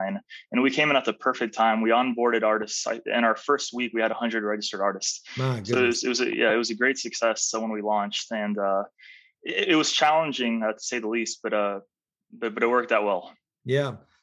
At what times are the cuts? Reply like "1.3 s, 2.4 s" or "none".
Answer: none